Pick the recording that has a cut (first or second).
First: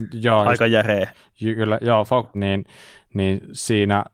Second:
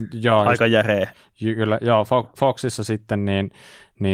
first